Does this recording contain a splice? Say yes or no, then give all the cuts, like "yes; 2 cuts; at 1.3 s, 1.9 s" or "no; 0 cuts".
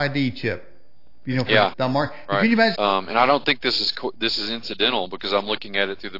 yes; 2 cuts; at 1.7 s, 2.7 s